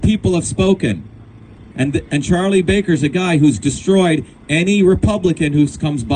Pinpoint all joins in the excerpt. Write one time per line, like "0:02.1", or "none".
0:01.7